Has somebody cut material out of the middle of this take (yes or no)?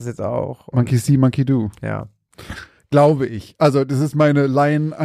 no